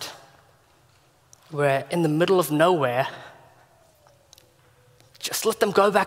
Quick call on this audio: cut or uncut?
uncut